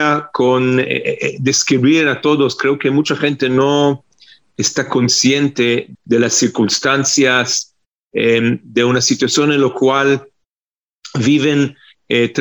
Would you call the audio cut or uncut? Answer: uncut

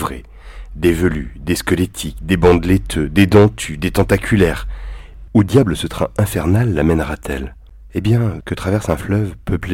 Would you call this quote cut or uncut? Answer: cut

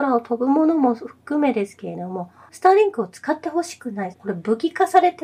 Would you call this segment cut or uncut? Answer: cut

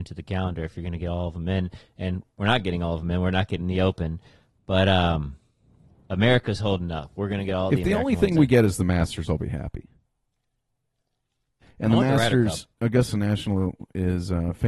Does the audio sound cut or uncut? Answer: cut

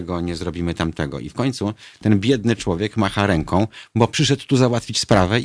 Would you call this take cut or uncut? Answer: uncut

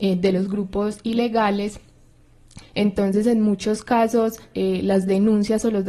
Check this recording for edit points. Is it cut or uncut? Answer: cut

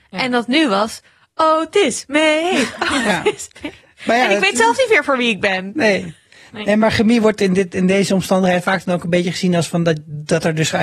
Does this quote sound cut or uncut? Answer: uncut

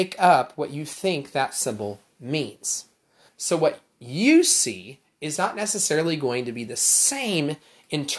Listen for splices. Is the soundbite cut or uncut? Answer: cut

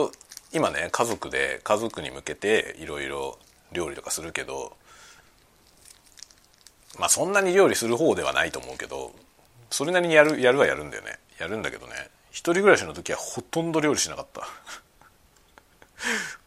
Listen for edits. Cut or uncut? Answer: uncut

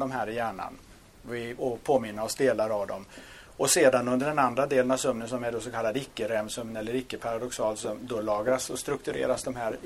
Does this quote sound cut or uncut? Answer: cut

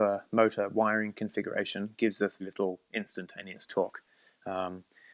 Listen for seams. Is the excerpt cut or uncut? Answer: cut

